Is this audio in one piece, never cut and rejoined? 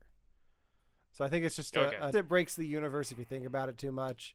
no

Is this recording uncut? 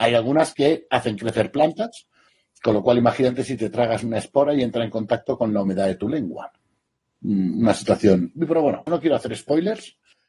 no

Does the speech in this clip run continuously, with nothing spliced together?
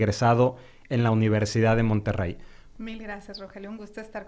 no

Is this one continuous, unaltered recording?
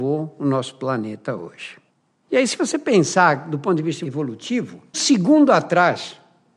no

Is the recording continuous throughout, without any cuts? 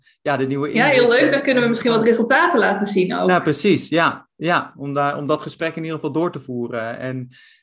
yes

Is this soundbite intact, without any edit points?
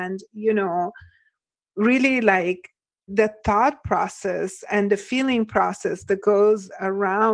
no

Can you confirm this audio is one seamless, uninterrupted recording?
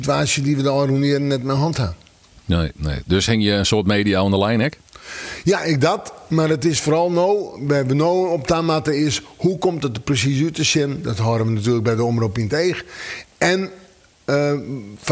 yes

